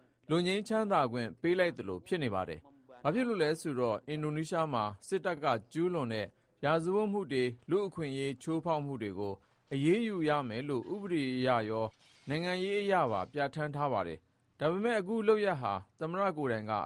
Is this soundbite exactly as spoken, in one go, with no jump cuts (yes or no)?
yes